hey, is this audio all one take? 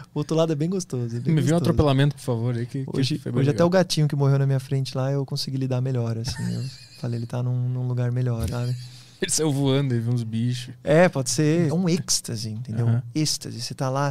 no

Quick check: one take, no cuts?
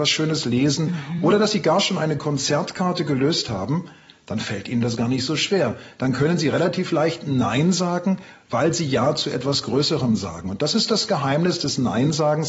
yes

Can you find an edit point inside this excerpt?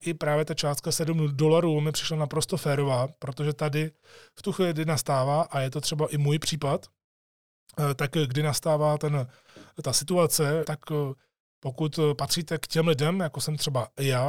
yes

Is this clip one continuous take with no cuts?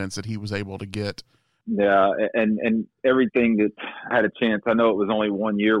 no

